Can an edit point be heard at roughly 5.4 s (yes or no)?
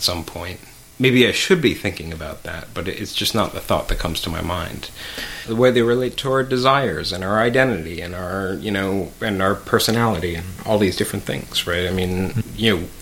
yes